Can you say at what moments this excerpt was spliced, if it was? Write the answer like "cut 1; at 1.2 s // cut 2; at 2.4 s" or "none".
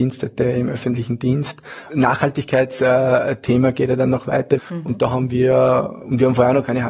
cut 1; at 1.9 s // cut 2; at 4.6 s